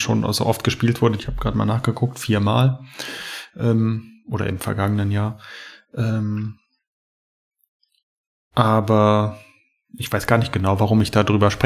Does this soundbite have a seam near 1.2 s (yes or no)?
yes